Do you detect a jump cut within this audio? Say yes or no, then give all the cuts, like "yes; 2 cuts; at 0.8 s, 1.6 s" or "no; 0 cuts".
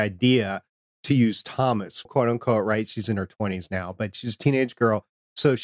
yes; 1 cut; at 2.1 s